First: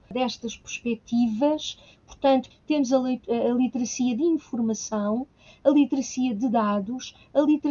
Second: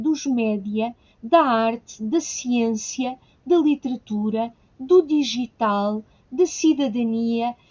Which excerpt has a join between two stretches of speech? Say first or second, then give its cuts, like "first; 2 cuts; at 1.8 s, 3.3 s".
first; 1 cut; at 2.5 s